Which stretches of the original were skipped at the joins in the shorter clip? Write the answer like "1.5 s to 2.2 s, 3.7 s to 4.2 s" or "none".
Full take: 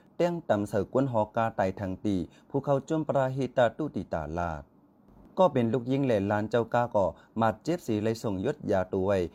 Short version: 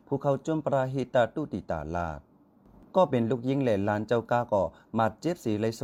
none